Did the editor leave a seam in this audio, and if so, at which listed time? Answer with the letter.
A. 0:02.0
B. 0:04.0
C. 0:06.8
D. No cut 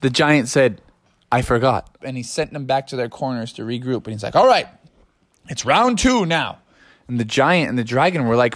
A